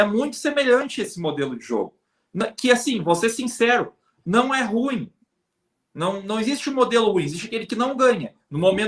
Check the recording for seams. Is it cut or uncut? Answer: uncut